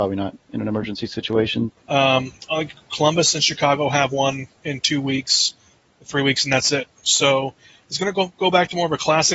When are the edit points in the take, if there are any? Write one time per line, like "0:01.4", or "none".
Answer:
0:01.7